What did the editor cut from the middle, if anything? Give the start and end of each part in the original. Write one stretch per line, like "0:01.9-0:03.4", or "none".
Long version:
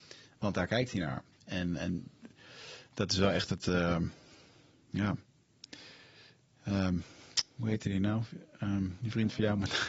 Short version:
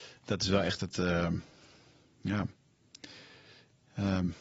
none